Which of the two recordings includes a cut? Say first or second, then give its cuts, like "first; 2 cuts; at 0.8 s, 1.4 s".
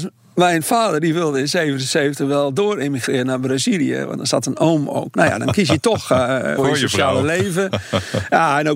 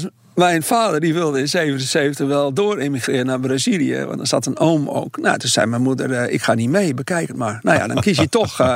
first; 2 cuts; at 5.1 s, 6.6 s